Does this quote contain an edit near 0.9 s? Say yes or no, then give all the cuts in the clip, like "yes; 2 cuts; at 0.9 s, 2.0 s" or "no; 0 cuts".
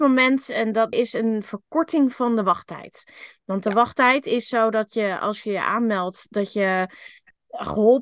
yes; 1 cut; at 0.9 s